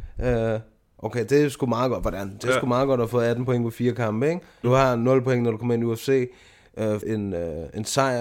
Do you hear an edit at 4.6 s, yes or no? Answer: yes